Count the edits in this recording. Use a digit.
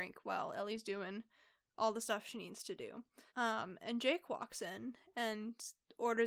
1